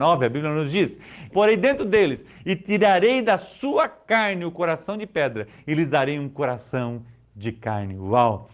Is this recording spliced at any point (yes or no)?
yes